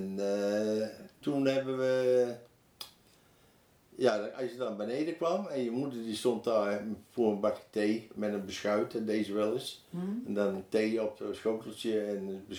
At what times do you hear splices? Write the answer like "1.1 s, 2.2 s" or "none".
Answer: 1.2 s

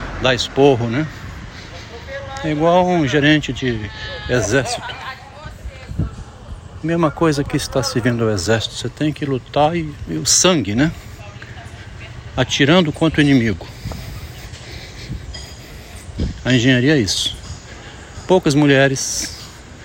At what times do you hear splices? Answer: none

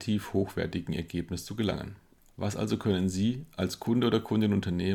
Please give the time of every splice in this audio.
none

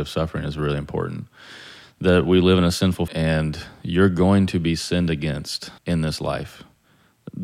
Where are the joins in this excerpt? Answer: 3.1 s, 5.8 s

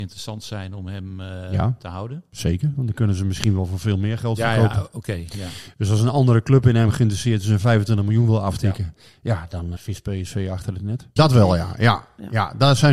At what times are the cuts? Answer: 9.8 s, 11.2 s

